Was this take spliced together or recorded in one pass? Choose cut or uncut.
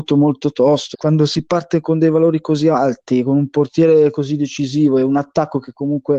cut